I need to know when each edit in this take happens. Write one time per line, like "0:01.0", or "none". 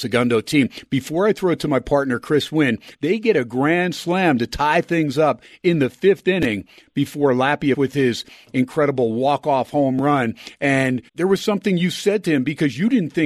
0:02.9
0:07.7
0:11.1